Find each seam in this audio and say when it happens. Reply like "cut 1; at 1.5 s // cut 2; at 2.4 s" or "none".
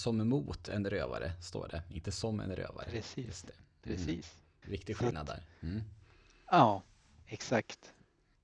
cut 1; at 4.6 s